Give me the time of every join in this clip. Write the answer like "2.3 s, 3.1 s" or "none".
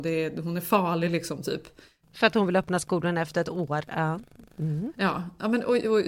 none